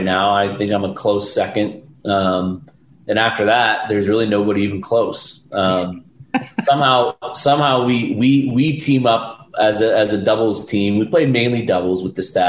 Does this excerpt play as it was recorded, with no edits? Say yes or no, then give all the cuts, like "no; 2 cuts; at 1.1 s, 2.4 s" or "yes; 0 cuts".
yes; 0 cuts